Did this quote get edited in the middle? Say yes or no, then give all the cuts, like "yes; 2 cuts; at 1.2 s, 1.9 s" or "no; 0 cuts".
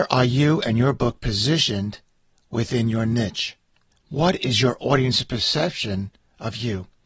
yes; 1 cut; at 3.9 s